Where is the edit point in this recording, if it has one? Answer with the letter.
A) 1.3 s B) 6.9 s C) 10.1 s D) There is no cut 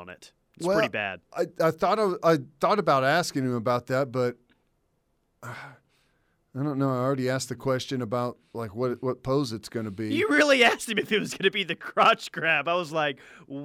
A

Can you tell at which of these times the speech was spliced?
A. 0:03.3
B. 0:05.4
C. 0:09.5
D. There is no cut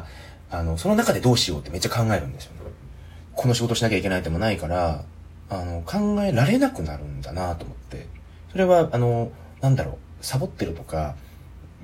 A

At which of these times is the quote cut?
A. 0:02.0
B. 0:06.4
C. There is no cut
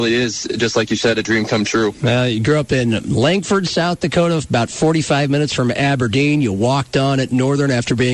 C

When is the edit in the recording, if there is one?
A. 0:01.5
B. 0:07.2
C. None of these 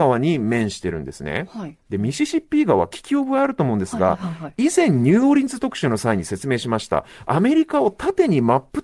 C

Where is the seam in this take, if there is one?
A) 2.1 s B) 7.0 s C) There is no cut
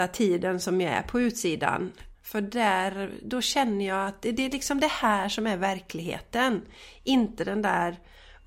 A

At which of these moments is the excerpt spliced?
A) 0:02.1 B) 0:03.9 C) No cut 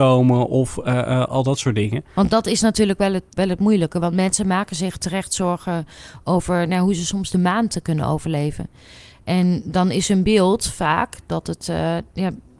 A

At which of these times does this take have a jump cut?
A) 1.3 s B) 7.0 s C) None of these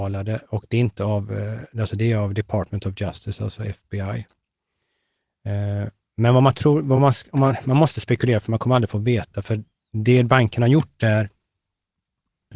C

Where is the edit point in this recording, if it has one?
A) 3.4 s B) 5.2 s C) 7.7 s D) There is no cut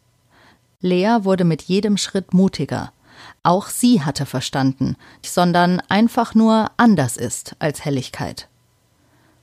B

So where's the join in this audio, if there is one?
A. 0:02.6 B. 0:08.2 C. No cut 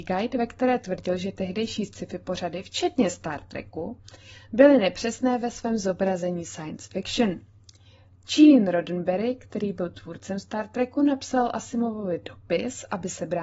C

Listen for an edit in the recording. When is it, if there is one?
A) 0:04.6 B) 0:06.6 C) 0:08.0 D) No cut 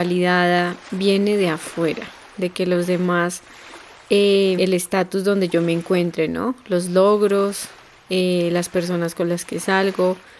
A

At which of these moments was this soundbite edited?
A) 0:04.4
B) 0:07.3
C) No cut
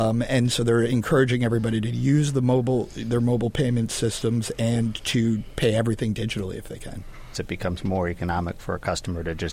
B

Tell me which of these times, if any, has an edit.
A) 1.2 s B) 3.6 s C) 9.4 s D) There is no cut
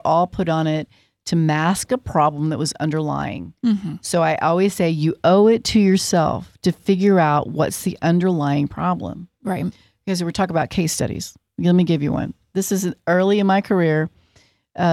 D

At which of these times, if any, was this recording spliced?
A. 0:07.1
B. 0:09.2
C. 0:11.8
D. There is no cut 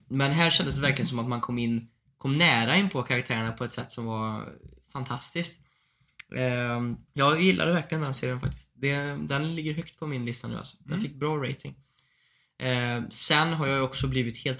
A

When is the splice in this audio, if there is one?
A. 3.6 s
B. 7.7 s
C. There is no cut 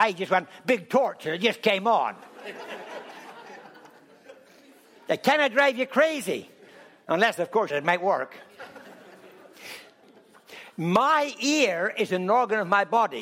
B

